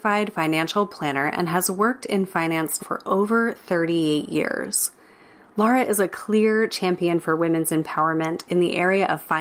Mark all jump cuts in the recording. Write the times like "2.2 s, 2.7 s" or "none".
2.8 s